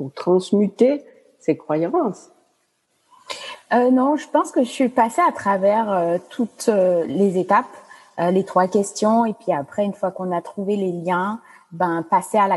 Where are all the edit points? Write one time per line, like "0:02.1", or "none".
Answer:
none